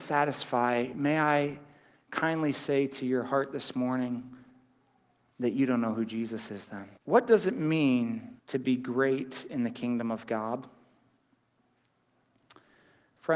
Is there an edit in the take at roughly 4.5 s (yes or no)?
no